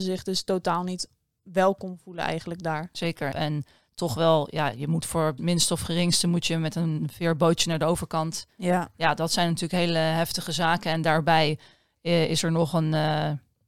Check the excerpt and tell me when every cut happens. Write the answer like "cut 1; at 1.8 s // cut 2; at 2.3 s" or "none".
cut 1; at 3.3 s // cut 2; at 5.4 s